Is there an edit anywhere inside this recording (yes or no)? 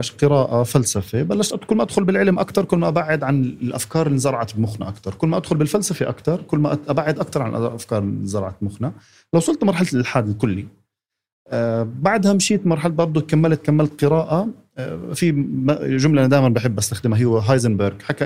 no